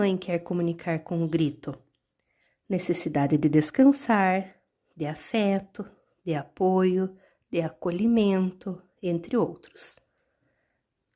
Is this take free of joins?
yes; 0 cuts

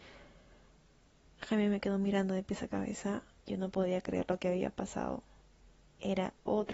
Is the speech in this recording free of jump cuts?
no; 1 cut; at 3.4 s

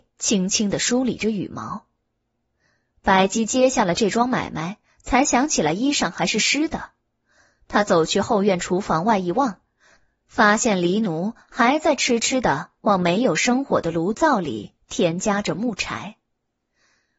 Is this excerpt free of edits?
yes; 0 cuts

